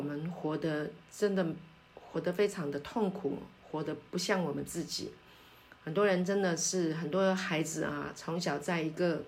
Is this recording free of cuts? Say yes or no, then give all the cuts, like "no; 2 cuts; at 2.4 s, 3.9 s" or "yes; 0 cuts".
yes; 0 cuts